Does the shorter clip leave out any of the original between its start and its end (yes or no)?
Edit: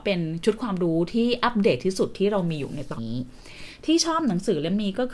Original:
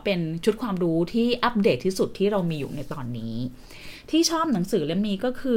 yes